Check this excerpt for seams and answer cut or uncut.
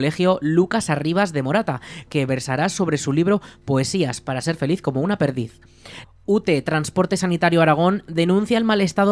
cut